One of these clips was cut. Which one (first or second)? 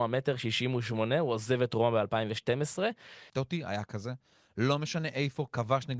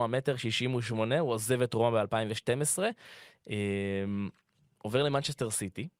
first